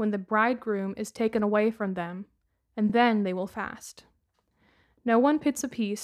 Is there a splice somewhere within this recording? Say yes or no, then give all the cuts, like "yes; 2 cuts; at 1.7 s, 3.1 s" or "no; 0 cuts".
no; 0 cuts